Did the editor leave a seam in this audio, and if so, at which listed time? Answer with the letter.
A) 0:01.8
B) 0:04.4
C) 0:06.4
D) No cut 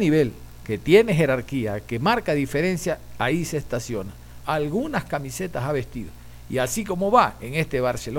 B